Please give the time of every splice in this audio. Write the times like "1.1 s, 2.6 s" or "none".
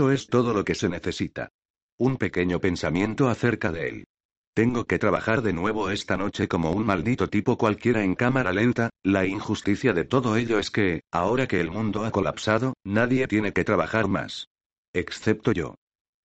8.9 s